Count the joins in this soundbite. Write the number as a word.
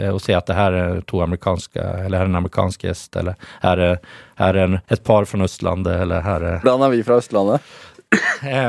two